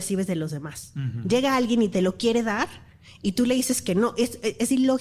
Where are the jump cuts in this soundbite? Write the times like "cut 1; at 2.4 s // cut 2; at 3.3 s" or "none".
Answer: none